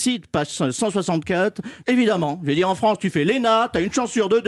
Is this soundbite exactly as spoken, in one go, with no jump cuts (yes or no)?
no